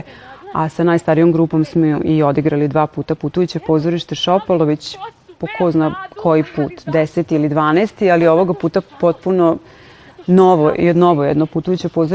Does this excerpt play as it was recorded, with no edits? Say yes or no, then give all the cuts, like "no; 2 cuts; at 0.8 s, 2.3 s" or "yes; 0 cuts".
no; 1 cut; at 8.9 s